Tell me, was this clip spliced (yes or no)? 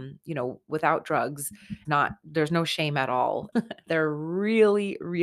yes